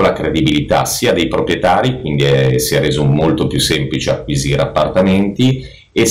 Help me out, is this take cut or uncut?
uncut